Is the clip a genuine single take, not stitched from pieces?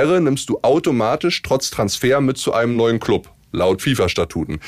yes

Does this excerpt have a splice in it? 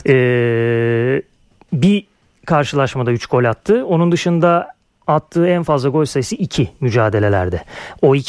no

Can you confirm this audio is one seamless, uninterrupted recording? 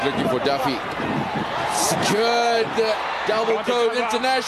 yes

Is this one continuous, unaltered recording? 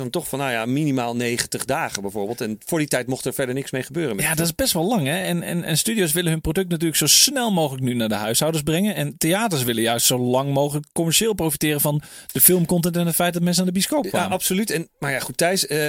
yes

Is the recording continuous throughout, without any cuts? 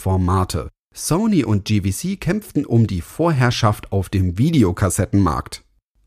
yes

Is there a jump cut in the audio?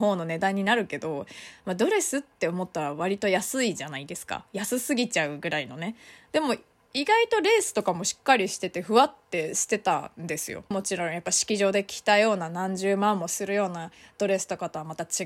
yes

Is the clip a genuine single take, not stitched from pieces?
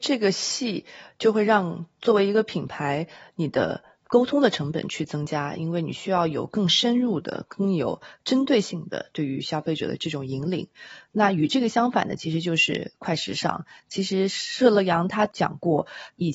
yes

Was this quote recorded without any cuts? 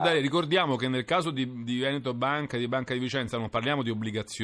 yes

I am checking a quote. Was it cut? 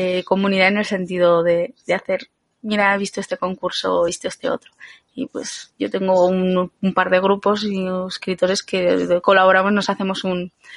no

